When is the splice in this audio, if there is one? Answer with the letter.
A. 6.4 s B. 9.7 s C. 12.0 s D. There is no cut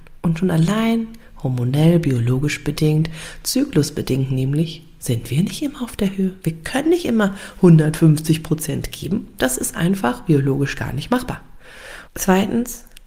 C